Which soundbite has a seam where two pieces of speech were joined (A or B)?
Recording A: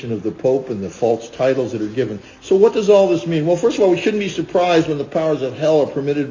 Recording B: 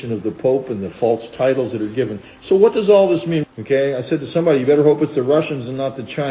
B